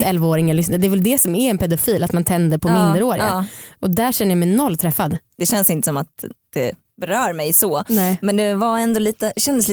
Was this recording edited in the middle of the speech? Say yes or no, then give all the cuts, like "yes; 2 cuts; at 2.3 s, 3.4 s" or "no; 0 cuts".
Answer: no; 0 cuts